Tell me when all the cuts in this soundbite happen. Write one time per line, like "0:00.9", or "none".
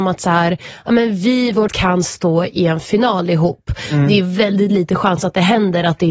0:01.7